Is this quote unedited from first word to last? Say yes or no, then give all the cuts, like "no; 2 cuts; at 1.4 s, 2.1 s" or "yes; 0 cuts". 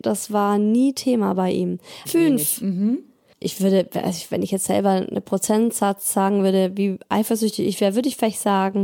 no; 1 cut; at 2.0 s